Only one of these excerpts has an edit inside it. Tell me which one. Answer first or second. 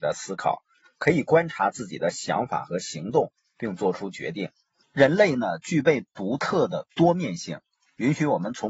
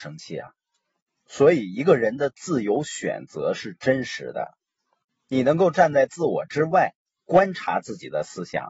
first